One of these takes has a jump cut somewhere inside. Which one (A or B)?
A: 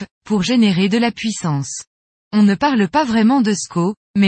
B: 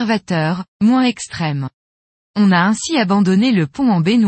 A